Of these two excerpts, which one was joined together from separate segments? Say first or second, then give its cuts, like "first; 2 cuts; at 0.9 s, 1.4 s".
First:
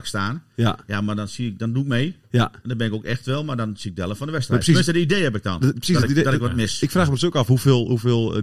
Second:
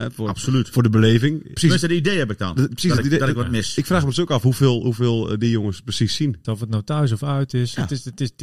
second; 2 cuts; at 1.6 s, 6.4 s